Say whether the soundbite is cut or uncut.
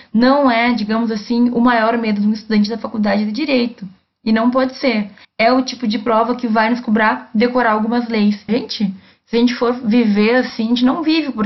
cut